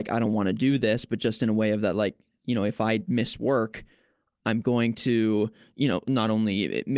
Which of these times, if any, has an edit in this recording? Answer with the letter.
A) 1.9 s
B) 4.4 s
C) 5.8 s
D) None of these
D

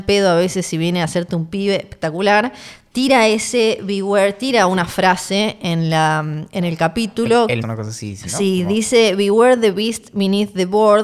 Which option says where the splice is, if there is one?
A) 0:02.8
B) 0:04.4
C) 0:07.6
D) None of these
C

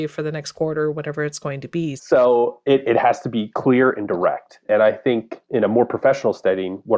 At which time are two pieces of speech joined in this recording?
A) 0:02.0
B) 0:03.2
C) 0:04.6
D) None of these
A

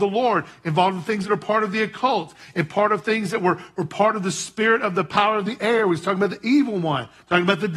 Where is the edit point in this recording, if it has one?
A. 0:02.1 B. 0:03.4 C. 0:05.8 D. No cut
D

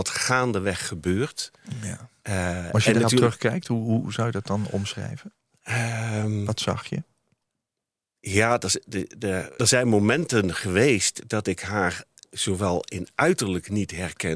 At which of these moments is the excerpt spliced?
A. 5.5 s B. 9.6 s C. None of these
B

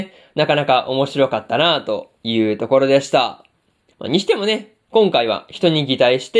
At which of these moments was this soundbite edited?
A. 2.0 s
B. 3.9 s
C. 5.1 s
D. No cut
B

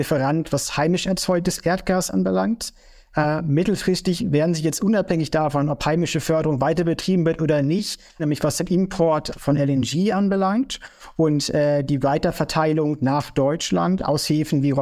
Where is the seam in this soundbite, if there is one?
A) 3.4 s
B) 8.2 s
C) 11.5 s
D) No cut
B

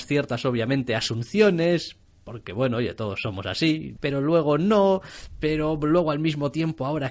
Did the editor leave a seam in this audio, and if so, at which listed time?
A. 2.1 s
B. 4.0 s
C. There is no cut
B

